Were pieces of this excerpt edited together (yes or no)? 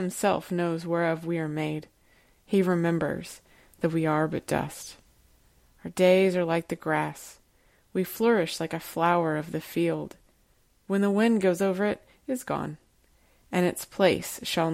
no